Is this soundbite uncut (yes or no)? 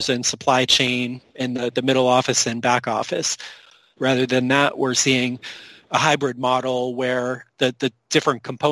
no